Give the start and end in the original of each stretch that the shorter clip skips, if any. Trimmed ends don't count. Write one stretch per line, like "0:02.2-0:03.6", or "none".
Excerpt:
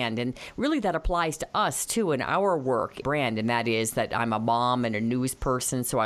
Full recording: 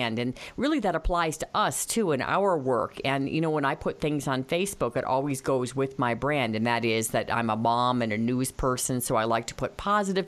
0:03.0-0:06.2

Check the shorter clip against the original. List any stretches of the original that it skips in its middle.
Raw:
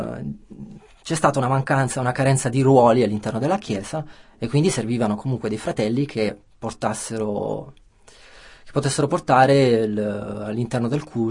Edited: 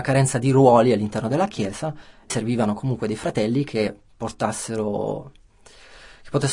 0:04.4-0:04.7

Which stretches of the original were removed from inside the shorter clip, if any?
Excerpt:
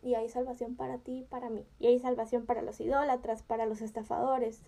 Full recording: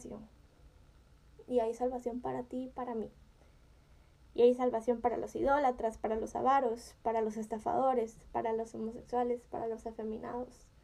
0:03.2-0:04.3
0:06.0-0:07.0

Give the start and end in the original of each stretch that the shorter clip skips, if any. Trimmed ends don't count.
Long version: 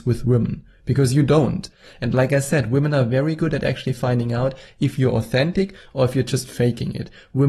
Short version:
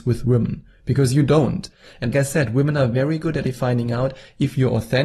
0:02.1-0:02.3
0:03.6-0:03.8

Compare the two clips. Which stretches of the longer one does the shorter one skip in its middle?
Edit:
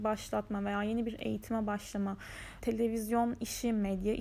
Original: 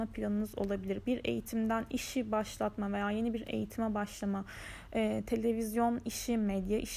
0:04.9-0:05.3

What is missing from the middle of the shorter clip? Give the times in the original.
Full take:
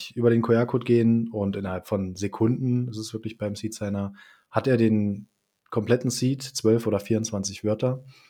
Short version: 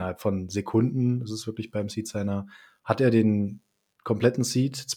none

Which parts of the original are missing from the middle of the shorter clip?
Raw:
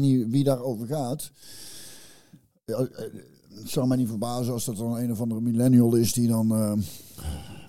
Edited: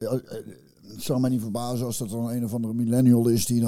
none

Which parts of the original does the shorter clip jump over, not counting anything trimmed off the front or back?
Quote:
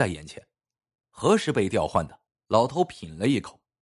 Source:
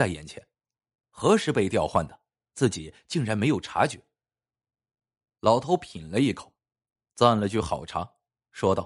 0:02.3-0:05.2

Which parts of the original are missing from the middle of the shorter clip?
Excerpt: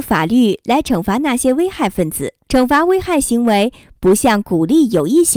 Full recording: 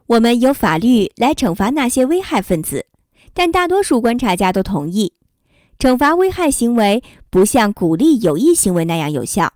0:03.0-0:05.8

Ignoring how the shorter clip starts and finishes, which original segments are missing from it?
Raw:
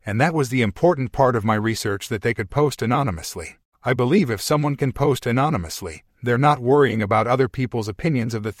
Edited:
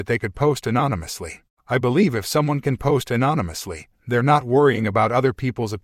none

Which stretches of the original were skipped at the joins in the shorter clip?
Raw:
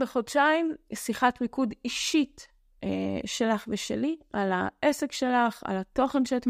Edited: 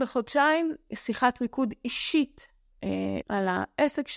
0:03.2-0:04.3

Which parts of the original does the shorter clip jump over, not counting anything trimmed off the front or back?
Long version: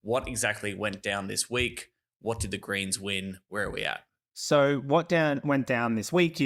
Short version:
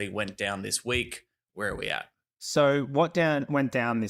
0:02.1-0:03.4

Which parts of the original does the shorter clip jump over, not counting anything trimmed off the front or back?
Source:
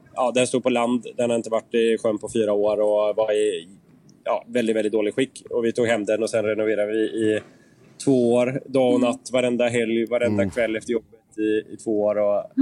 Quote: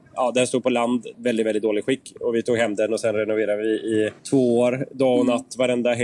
0:01.1-0:04.4
0:07.5-0:07.9

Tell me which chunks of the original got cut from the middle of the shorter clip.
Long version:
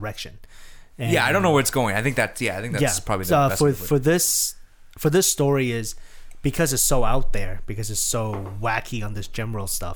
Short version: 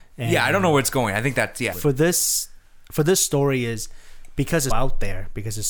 0:02.5-0:03.8
0:06.8-0:07.0

